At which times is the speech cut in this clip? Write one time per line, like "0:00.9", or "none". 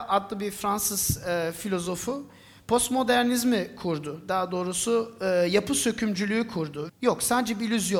0:06.9